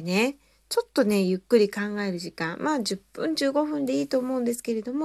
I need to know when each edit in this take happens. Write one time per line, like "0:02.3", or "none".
none